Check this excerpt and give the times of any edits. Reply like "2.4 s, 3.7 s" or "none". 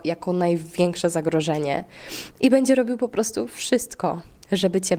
2.3 s